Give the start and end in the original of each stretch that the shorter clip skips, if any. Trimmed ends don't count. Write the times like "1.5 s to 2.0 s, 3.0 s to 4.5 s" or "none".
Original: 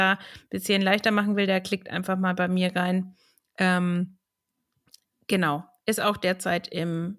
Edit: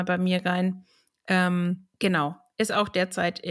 4.2 s to 5.2 s